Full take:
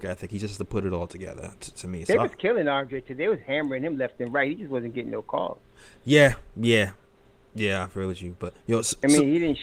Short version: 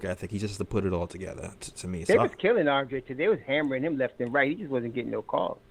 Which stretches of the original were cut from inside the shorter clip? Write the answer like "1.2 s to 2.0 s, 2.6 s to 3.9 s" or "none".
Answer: none